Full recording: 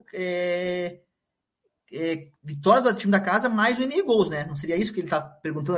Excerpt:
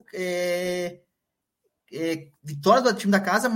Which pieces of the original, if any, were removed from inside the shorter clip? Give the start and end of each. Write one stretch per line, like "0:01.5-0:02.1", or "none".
none